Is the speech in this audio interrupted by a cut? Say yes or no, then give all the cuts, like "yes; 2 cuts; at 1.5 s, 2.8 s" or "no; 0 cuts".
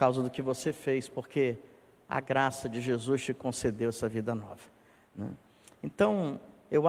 no; 0 cuts